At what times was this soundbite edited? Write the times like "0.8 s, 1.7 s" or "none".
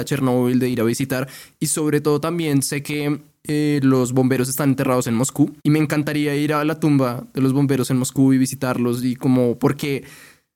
5.6 s